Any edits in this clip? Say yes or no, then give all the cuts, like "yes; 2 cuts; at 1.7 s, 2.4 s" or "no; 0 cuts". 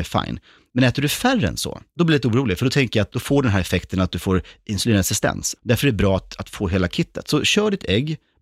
yes; 3 cuts; at 1.9 s, 3.1 s, 5.6 s